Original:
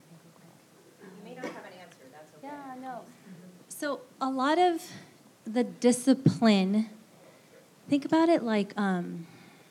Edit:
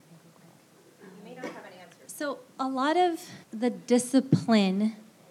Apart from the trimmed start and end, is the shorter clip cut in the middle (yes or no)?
yes